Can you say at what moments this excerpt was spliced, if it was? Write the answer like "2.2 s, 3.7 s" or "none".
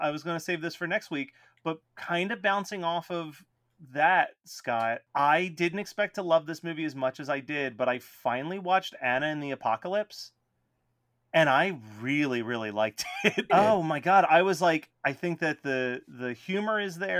13.5 s